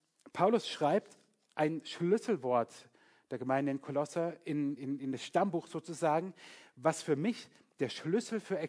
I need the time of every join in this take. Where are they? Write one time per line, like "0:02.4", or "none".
0:04.8